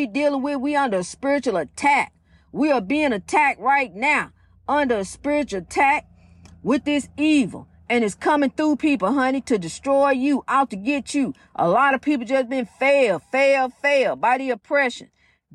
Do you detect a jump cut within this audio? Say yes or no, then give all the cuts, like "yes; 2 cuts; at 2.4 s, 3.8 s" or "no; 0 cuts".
no; 0 cuts